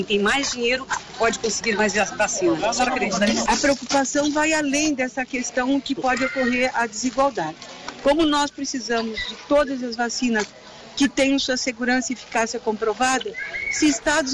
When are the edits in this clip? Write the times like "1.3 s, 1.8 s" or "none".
3.5 s